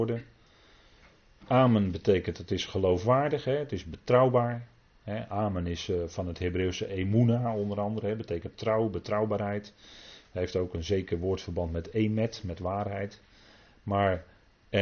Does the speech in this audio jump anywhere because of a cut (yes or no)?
no